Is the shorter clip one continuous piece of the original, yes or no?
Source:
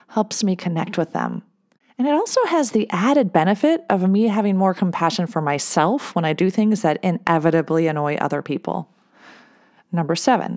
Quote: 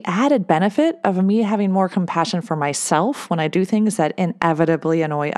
yes